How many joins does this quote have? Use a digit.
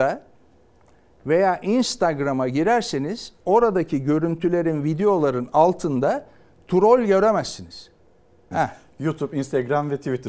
1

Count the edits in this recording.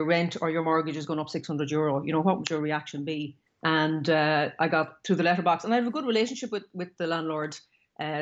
1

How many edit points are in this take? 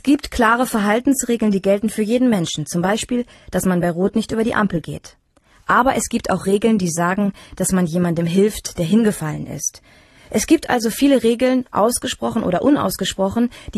0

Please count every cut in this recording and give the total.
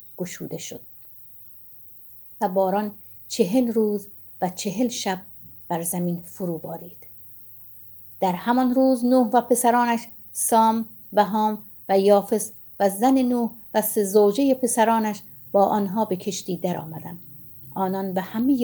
0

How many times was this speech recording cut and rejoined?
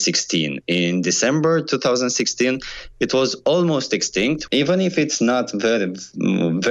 1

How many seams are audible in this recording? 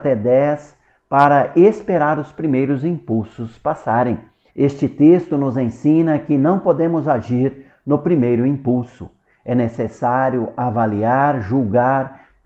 1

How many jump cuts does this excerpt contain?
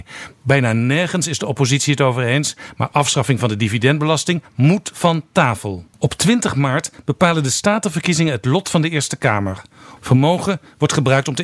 2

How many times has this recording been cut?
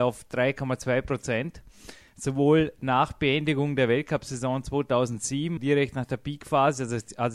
1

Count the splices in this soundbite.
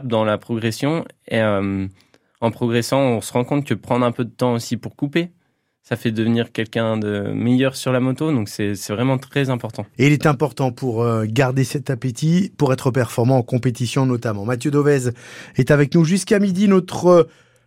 0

